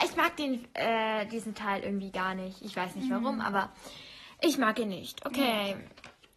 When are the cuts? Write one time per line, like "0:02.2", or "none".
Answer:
none